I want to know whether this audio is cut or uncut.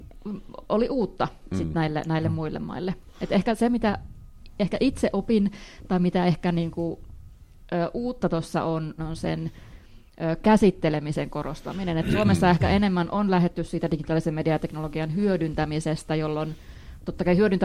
cut